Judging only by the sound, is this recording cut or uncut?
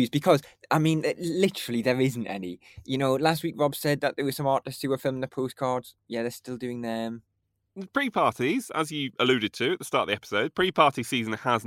uncut